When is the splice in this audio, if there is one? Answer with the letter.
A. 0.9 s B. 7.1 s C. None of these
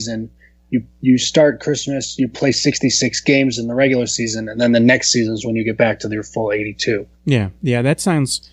B